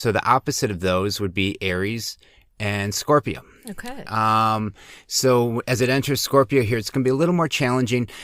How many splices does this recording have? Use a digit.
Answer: 0